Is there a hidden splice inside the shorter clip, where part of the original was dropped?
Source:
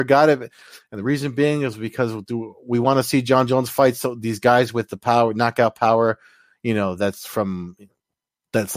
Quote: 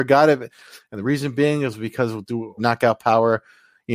yes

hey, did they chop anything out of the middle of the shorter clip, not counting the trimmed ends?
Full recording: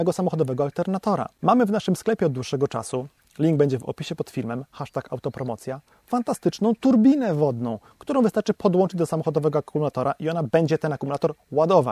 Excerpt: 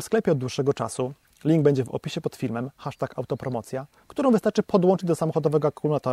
yes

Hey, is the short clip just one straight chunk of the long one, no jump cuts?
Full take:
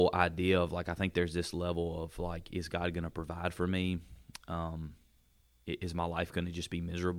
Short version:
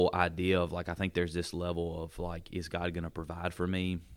yes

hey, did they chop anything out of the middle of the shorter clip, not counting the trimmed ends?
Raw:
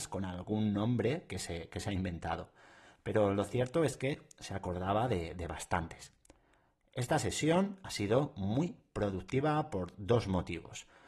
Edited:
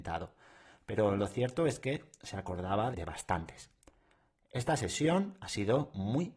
yes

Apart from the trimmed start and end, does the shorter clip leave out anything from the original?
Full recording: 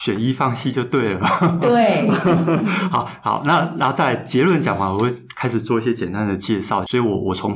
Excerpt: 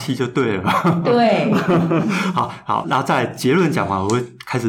yes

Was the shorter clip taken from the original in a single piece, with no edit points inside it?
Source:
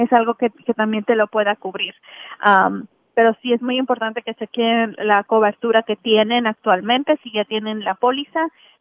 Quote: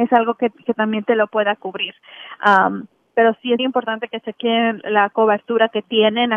no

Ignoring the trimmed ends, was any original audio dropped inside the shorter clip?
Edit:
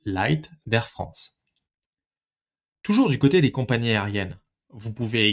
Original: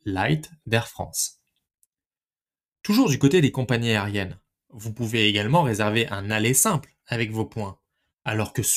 no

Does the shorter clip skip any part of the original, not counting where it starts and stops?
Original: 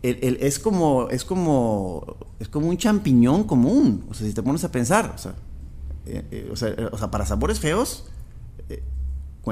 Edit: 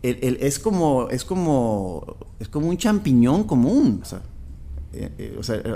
yes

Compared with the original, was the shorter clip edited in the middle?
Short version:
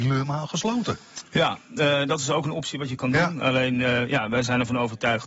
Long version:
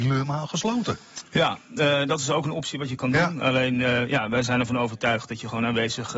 no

